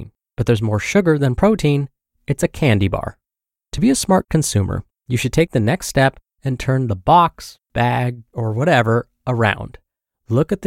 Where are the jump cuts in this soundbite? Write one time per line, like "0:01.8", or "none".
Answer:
0:03.6
0:08.3